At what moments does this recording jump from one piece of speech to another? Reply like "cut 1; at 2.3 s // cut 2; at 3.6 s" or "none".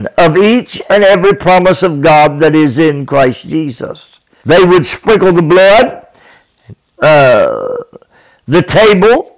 cut 1; at 4.4 s // cut 2; at 7.0 s